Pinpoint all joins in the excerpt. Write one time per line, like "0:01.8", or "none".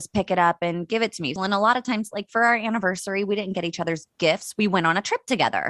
0:01.4